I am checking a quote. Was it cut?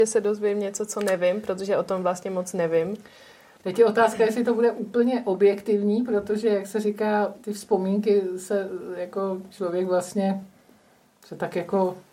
no; 0 cuts

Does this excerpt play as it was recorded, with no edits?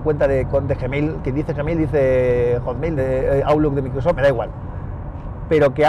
no; 2 cuts; at 3.0 s, 4.2 s

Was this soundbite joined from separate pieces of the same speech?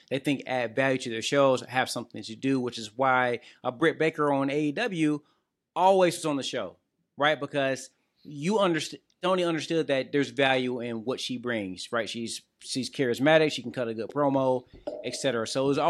no; 0 cuts

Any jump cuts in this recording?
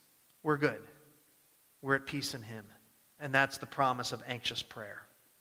no; 0 cuts

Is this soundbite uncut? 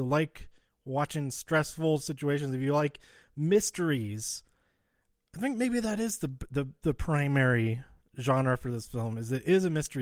yes; 0 cuts

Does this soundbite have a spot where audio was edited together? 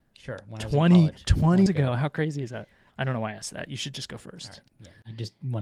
yes; 2 cuts; at 1.7 s, 2.9 s

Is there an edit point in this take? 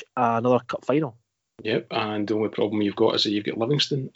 no; 0 cuts

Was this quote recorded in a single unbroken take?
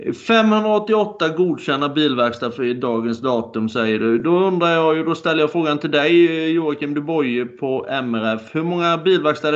yes; 0 cuts

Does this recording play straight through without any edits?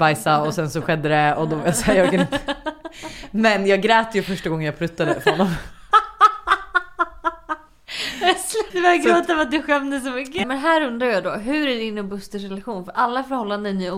no; 2 cuts; at 8.7 s, 10.4 s

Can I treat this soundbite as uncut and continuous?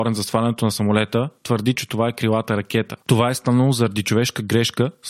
no; 2 cuts; at 1.7 s, 3.0 s

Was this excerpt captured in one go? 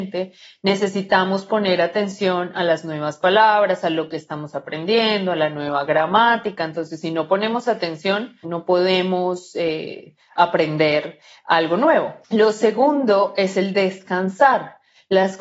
no; 2 cuts; at 8.4 s, 12.2 s

